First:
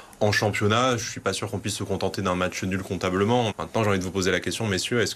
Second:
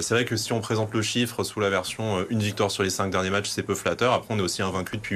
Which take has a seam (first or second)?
first